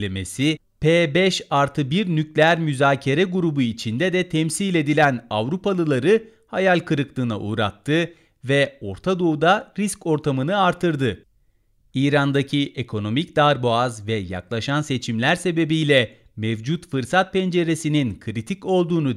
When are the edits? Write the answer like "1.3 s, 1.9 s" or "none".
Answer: none